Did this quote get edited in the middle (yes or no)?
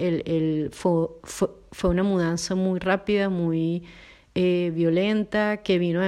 no